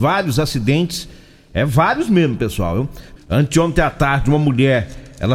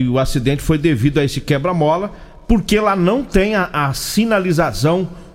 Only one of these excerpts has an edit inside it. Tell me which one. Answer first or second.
first